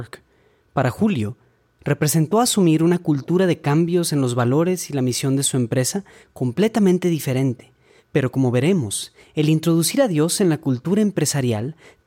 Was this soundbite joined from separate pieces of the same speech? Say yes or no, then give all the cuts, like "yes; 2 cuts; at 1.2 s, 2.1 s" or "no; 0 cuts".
yes; 1 cut; at 8.0 s